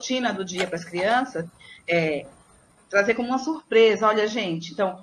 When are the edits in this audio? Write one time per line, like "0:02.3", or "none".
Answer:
none